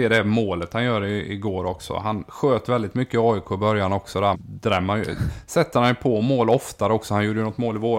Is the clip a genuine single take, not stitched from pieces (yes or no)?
no